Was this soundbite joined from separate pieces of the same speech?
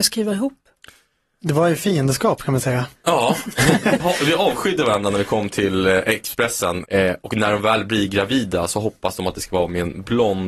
yes; 2 cuts; at 4.0 s, 6.8 s

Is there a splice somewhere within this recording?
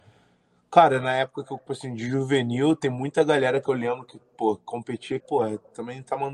yes; 2 cuts; at 1.7 s, 5.2 s

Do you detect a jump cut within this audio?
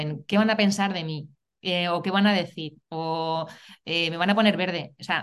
no; 0 cuts

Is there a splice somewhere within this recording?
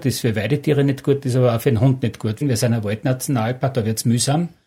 yes; 2 cuts; at 2.4 s, 3.7 s

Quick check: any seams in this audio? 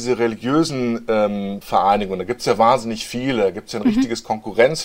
no; 0 cuts

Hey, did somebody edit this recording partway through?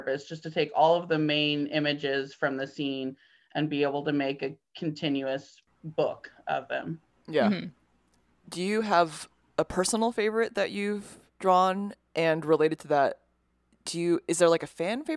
no; 0 cuts

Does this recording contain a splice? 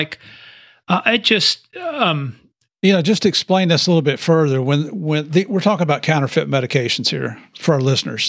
no; 0 cuts

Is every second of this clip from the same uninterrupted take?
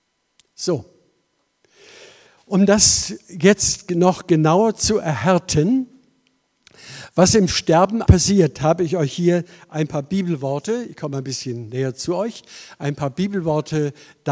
no; 1 cut; at 8.1 s

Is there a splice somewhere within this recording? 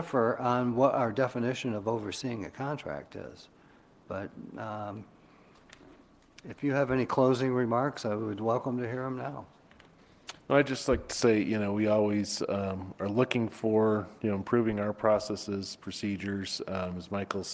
no; 0 cuts

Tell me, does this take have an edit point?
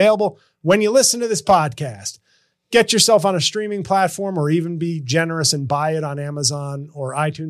no; 0 cuts

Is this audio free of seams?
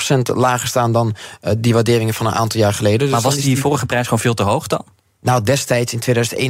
yes; 0 cuts

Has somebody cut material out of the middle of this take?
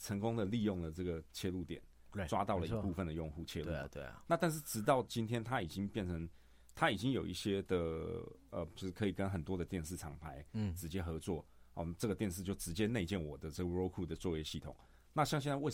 yes; 1 cut; at 8.7 s

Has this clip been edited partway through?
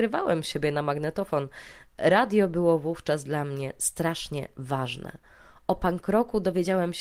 no; 0 cuts

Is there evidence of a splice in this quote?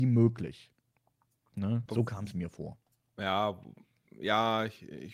yes; 1 cut; at 1.9 s

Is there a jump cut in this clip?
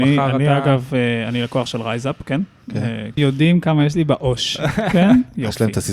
yes; 1 cut; at 3.2 s

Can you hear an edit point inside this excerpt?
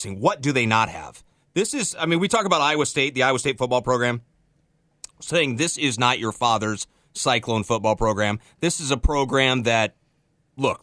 no; 0 cuts

